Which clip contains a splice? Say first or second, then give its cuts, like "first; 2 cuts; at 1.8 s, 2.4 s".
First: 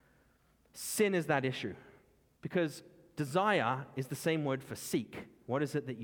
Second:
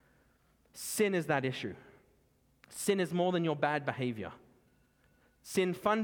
first; 1 cut; at 2.4 s